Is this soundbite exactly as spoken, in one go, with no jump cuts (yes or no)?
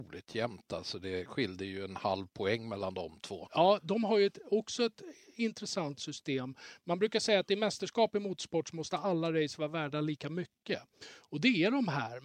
yes